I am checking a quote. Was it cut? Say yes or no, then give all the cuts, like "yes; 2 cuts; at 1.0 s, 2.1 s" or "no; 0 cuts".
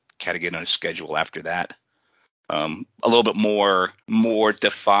yes; 1 cut; at 4.0 s